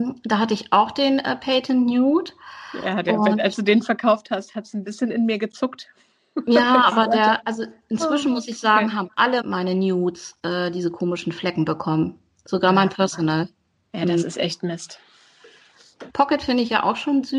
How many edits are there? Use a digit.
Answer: 2